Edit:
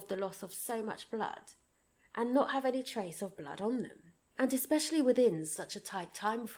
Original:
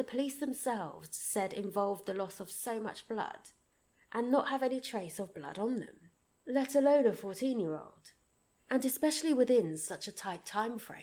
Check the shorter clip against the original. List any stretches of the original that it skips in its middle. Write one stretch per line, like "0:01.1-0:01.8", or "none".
0:06.3-0:08.6